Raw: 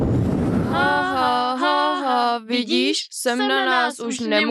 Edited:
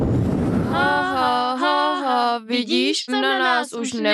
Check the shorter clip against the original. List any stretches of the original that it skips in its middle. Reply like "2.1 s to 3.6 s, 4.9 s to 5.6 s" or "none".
3.1 s to 3.3 s